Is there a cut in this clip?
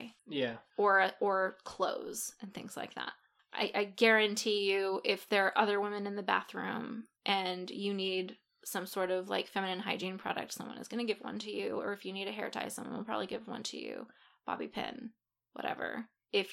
no; 0 cuts

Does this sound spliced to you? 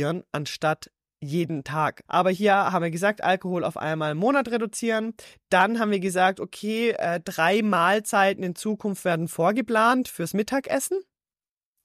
yes; 1 cut; at 2.1 s

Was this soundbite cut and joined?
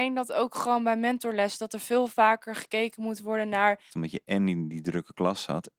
yes; 1 cut; at 3.9 s

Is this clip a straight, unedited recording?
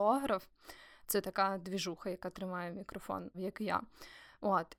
no; 1 cut; at 3.3 s

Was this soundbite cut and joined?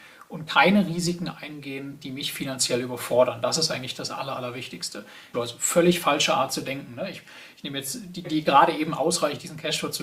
yes; 2 cuts; at 5.3 s, 8.2 s

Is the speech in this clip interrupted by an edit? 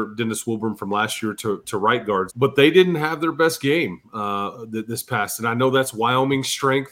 yes; 1 cut; at 2.3 s

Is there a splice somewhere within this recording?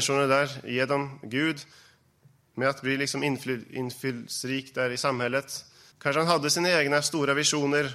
yes; 1 cut; at 5.9 s

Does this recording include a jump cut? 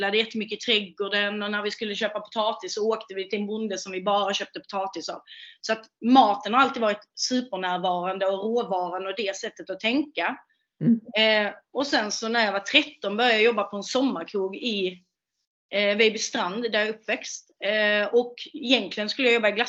no; 0 cuts

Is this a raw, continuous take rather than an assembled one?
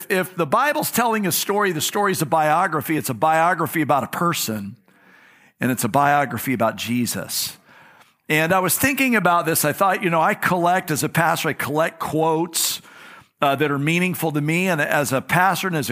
yes; 0 cuts

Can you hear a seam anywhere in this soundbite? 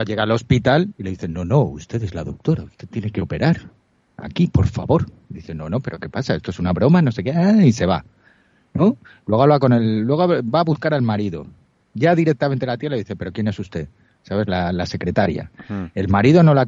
no; 0 cuts

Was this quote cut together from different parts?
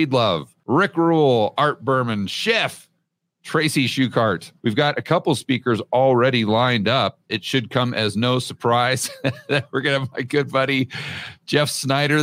yes; 2 cuts; at 4.6 s, 7.3 s

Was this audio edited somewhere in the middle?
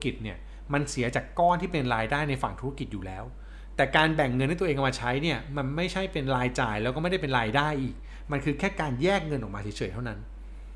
no; 0 cuts

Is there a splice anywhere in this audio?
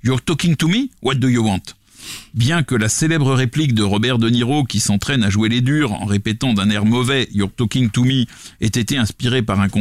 no; 0 cuts

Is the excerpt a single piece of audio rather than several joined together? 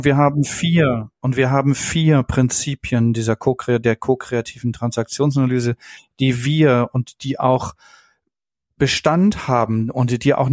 yes; 0 cuts

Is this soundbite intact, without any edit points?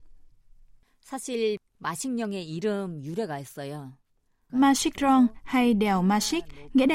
no; 1 cut; at 4.5 s

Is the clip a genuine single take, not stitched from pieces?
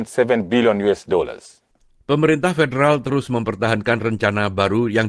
yes; 0 cuts

